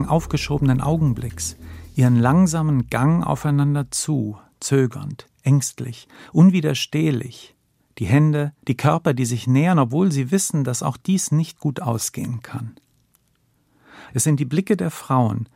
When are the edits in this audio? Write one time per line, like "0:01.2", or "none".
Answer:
0:08.6
0:14.1